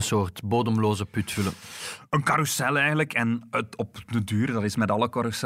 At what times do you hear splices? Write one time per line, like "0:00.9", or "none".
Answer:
none